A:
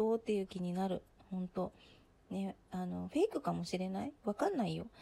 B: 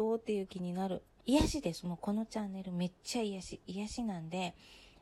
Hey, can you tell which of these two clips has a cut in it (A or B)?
B